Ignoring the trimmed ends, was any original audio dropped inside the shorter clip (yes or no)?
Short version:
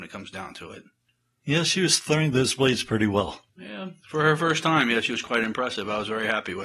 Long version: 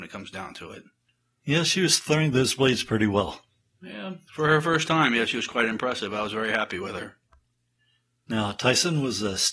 yes